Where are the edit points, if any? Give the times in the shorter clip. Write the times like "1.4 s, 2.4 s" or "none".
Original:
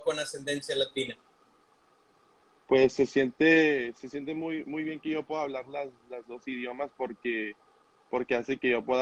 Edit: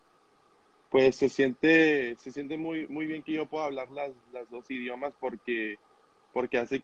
none